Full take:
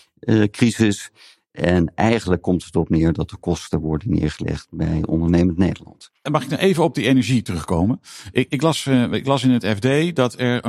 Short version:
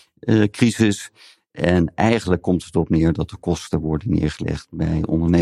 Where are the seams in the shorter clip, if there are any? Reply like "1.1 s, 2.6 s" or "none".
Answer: none